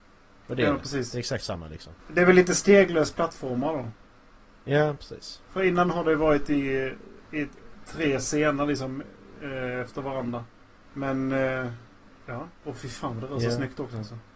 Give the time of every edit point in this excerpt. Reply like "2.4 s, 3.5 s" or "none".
2.0 s, 10.8 s, 12.6 s